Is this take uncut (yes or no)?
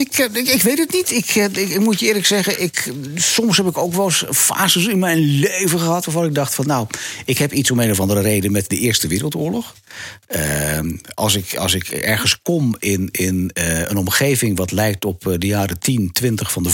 yes